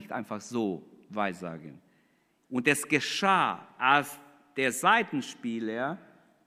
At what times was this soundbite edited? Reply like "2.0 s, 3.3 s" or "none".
2.4 s